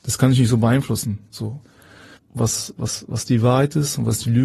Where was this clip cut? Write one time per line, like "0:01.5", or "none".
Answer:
0:02.2